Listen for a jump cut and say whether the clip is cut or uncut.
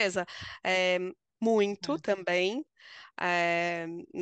cut